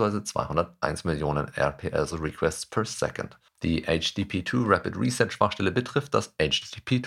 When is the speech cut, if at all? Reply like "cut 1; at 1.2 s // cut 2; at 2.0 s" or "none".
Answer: cut 1; at 2.1 s